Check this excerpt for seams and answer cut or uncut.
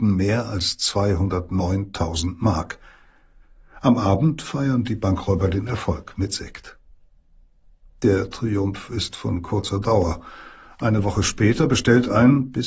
uncut